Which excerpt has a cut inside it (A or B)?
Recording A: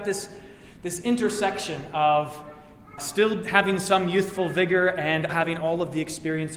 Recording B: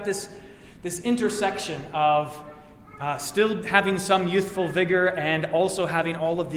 A